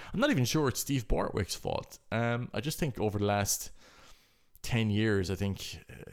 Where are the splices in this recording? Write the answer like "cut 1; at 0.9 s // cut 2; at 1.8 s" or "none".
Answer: none